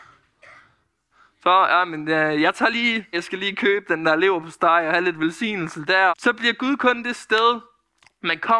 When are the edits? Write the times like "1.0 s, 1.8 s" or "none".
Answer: 3.1 s, 6.1 s